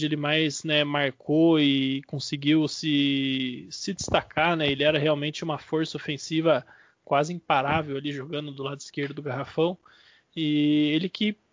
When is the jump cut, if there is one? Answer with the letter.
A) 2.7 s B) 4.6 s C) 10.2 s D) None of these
D